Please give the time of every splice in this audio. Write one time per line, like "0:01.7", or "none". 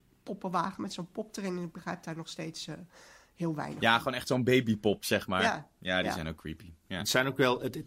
none